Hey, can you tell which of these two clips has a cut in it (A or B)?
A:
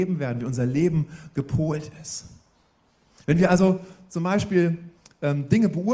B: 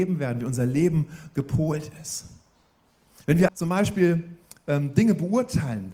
B